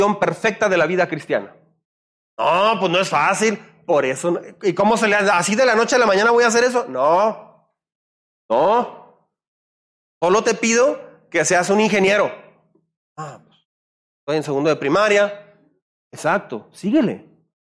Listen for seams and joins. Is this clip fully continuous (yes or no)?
yes